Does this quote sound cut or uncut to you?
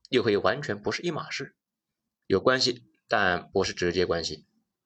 cut